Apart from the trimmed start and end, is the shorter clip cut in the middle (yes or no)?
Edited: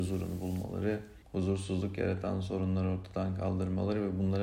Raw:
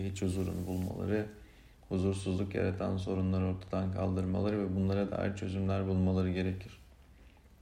yes